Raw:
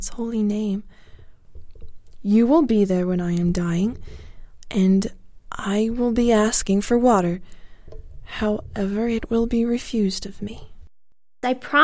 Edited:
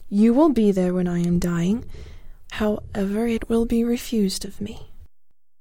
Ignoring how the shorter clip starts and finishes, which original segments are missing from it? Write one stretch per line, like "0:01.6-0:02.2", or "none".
0:04.6-0:08.3